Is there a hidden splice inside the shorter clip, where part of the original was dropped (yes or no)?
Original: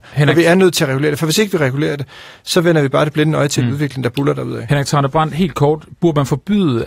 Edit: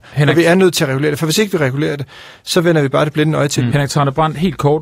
yes